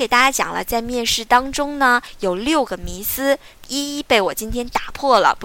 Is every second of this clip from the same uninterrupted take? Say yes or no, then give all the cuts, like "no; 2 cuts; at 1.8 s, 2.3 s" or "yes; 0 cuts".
yes; 0 cuts